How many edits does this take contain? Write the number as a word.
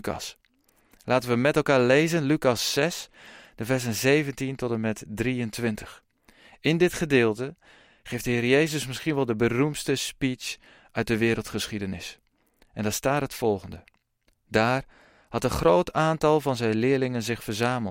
one